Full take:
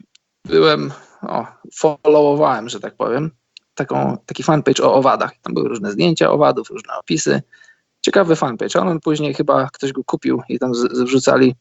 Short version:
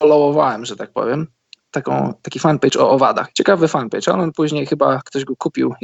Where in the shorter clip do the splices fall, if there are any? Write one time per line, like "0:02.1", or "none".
0:03.3